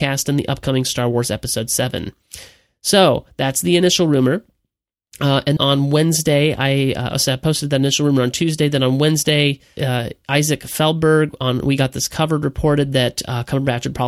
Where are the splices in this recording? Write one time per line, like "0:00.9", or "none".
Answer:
0:05.6
0:09.8